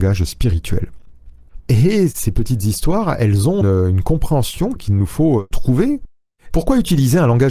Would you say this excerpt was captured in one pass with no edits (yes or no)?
no